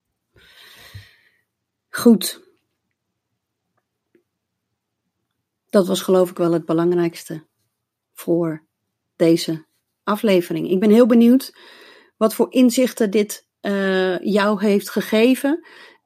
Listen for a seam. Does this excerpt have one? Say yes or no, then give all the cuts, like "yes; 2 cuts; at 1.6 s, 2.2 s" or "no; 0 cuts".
no; 0 cuts